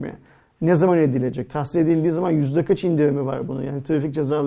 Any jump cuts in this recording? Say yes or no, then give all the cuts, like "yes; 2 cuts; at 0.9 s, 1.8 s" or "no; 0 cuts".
no; 0 cuts